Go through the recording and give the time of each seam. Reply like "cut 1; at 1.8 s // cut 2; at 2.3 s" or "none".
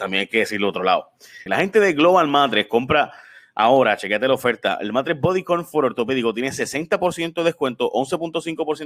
cut 1; at 1.5 s